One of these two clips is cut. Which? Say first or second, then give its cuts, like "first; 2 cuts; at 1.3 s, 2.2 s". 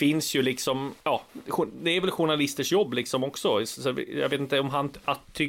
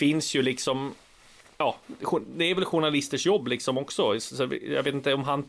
first; 1 cut; at 1.0 s